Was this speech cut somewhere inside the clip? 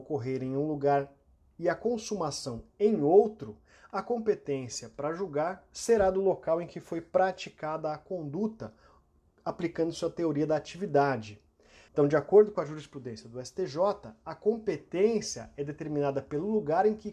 yes; 1 cut; at 11.9 s

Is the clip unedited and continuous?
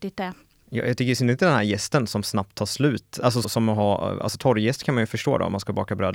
no; 1 cut; at 3.4 s

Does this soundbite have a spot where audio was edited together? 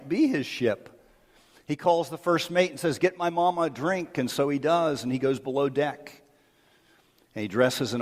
no; 0 cuts

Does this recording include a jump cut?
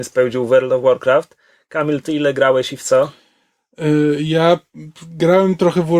no; 0 cuts

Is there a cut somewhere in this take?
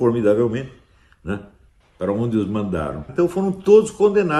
yes; 2 cuts; at 1.8 s, 3.1 s

